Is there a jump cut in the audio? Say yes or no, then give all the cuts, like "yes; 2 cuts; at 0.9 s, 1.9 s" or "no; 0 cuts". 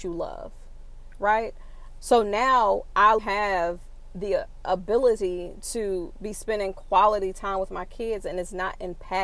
yes; 2 cuts; at 2.0 s, 3.2 s